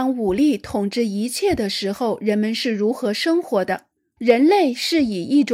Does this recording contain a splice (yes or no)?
yes